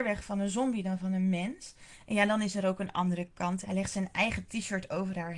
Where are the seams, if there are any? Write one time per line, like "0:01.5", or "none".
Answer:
0:03.6